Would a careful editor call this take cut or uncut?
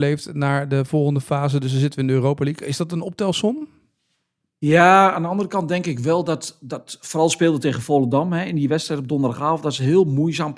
uncut